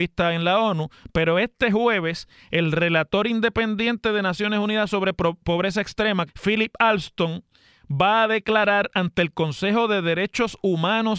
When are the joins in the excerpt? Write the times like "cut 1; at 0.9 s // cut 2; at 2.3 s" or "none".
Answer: cut 1; at 6.3 s

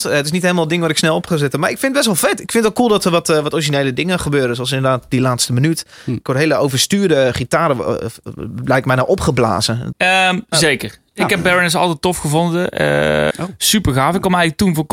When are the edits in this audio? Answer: cut 1; at 9.9 s // cut 2; at 13.3 s

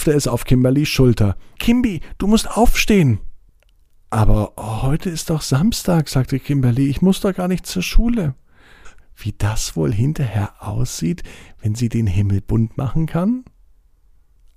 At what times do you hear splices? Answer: cut 1; at 1.6 s // cut 2; at 9.0 s

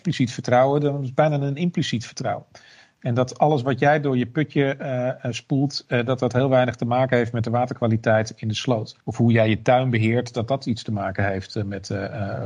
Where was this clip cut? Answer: cut 1; at 9.0 s

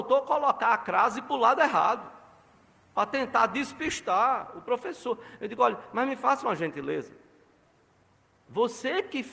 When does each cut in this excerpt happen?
none

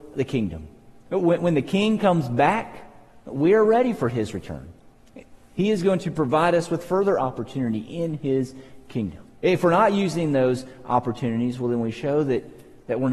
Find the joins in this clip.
cut 1; at 9.4 s

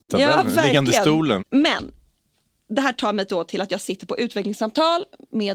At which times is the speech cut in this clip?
cut 1; at 1.4 s

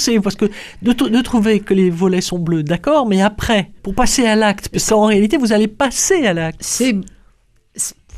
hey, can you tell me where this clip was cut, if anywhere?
cut 1; at 3.8 s

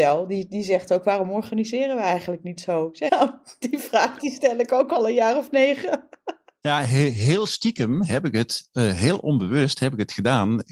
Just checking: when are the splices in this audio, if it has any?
cut 1; at 3.1 s

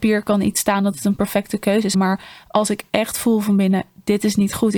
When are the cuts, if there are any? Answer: cut 1; at 1.9 s

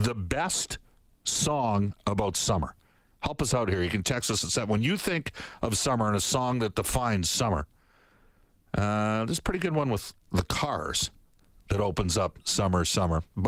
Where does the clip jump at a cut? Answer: cut 1; at 10.2 s

